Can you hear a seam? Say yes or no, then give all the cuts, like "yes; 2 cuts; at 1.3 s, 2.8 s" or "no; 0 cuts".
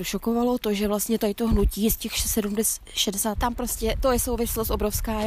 yes; 1 cut; at 3.4 s